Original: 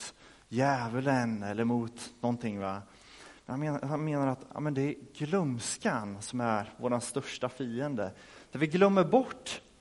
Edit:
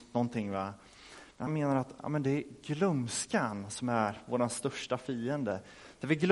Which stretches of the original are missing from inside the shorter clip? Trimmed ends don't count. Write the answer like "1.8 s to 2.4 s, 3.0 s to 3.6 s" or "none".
3.6 s to 4.0 s